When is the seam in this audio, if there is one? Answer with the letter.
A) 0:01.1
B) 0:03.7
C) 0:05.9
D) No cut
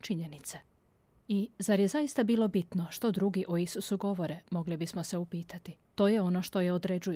C